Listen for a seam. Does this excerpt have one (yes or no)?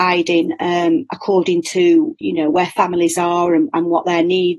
no